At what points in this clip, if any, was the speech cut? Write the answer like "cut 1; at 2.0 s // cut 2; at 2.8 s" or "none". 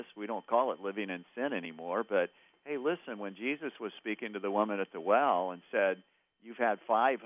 none